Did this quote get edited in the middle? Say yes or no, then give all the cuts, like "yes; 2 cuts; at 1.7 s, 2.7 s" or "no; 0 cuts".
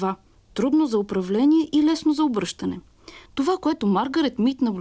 yes; 1 cut; at 3.3 s